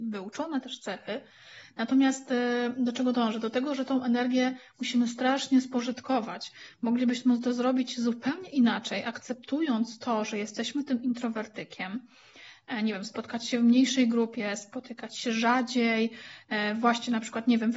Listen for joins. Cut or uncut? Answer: uncut